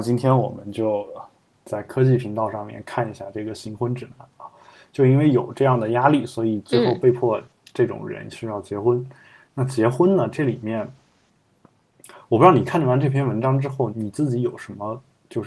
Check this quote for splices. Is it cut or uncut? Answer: cut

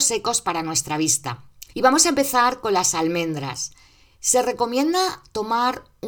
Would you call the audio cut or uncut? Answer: cut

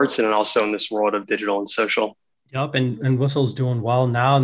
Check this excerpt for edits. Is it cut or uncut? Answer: uncut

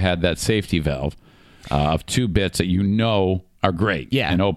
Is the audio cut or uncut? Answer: cut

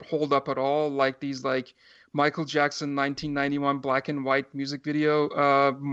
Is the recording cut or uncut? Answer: uncut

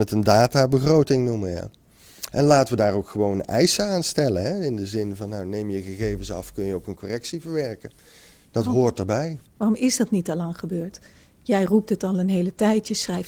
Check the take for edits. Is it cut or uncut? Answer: cut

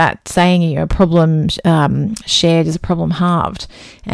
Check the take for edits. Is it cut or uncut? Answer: uncut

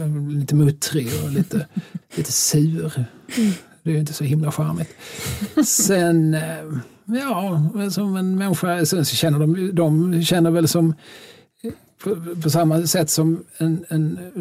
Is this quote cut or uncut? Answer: cut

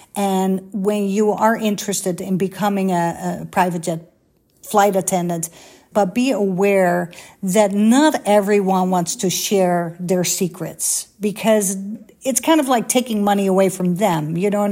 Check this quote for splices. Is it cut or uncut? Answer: cut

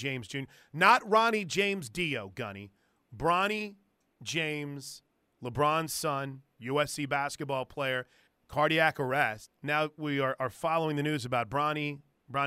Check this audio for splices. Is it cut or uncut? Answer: cut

